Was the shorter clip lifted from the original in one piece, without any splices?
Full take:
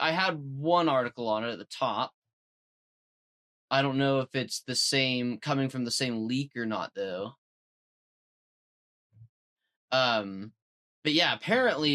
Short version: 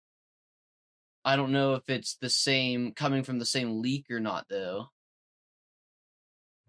yes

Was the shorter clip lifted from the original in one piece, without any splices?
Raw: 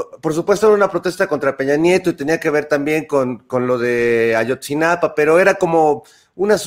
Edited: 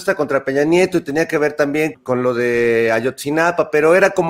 no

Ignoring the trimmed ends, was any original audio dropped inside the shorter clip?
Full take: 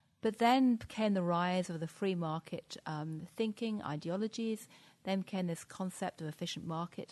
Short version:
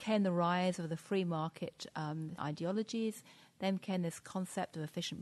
yes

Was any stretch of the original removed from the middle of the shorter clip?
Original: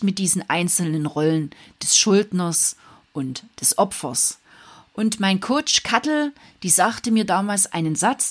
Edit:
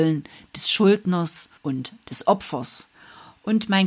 yes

